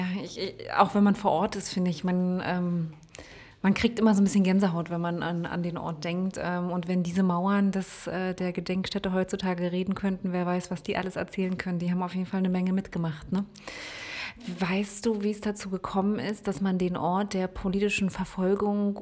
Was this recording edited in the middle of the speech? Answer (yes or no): no